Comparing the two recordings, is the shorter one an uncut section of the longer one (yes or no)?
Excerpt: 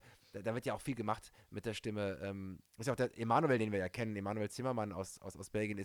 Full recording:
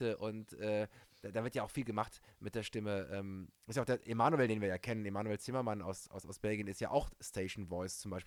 yes